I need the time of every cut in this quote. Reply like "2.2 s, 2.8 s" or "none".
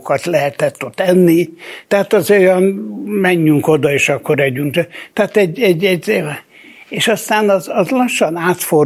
none